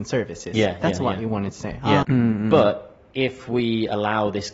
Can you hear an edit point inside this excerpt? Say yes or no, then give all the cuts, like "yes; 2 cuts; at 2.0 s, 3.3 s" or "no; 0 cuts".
yes; 1 cut; at 2.0 s